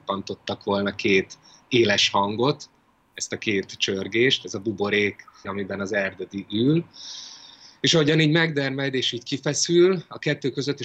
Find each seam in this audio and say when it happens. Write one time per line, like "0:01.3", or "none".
0:05.4

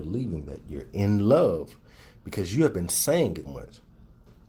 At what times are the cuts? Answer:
0:03.4

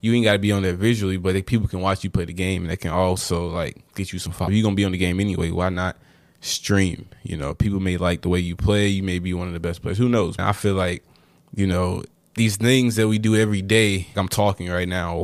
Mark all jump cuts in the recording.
0:04.5
0:10.4
0:14.1

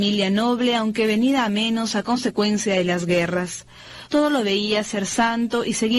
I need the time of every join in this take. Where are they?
0:04.1

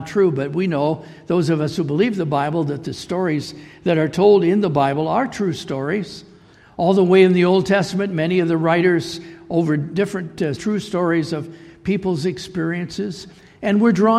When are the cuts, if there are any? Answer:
0:10.6

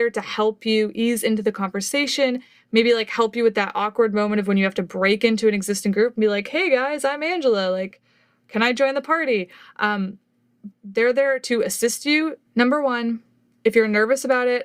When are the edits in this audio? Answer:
0:10.7
0:12.4

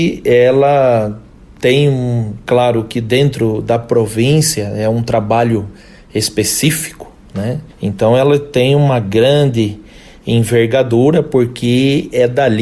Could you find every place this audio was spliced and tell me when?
0:07.7

